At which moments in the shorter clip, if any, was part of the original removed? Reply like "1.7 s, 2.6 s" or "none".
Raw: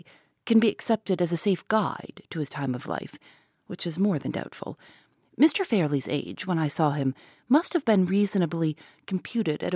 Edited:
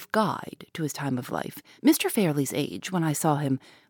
1.8 s

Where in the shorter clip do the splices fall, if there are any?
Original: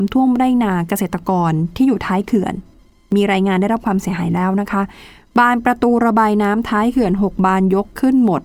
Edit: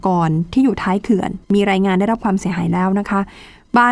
1.4 s

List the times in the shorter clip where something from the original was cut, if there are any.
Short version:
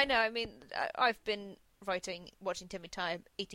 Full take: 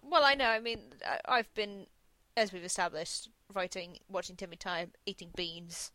1.7 s

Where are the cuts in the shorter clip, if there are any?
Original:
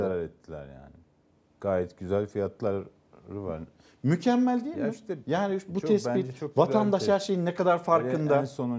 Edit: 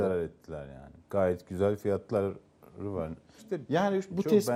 1.0 s, 3.4 s

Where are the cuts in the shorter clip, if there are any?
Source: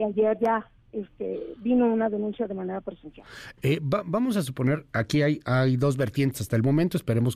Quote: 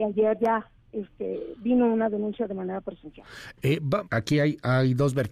4.0 s

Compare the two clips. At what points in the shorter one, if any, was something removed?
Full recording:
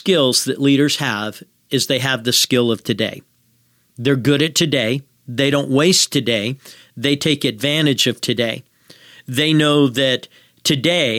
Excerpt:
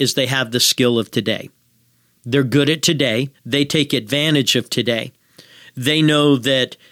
3.3 s

